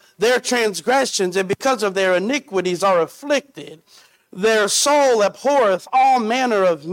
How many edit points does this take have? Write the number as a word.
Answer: zero